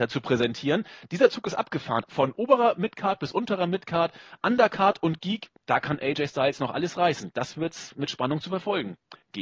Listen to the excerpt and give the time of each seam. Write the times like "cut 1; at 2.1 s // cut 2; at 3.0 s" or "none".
cut 1; at 2.0 s